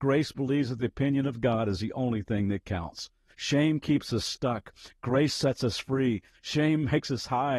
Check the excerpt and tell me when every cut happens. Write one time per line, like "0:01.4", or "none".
none